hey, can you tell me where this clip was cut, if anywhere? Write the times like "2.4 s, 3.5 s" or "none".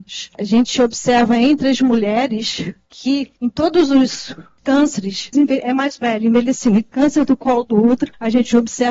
5.3 s